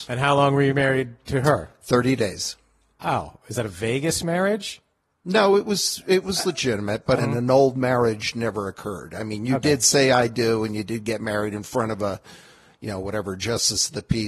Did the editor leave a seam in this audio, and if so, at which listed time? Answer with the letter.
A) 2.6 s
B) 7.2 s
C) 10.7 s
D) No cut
B